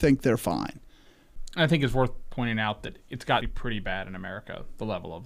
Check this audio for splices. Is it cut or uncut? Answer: cut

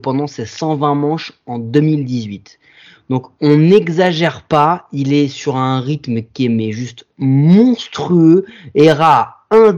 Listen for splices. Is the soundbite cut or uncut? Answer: uncut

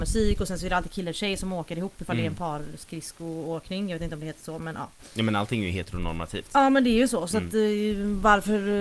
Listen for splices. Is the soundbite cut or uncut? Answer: uncut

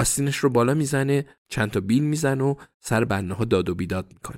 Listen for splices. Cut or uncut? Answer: cut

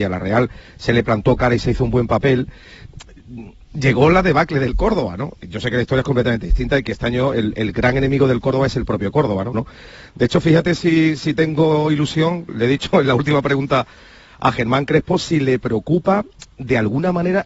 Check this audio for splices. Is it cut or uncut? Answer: cut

